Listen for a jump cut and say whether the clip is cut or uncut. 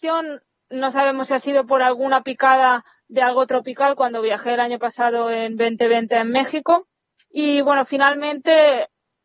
cut